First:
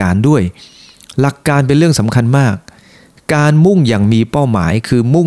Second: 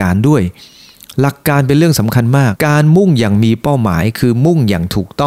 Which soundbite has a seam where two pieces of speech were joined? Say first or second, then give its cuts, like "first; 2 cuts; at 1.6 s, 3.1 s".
second; 1 cut; at 2.5 s